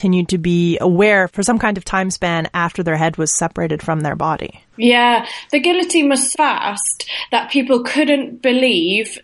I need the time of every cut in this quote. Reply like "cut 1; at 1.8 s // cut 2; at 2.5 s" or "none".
cut 1; at 6.3 s